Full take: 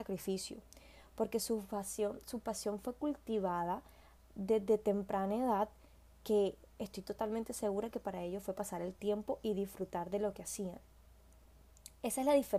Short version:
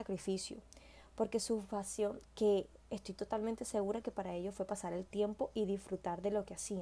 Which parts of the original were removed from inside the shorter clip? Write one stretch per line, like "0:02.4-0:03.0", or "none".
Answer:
0:02.2-0:06.1